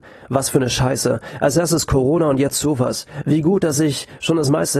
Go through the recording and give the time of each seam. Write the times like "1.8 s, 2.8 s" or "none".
none